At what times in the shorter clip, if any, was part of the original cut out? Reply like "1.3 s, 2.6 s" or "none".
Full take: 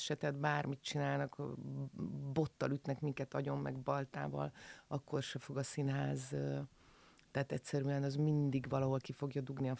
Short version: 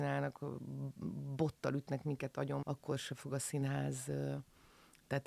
2.6 s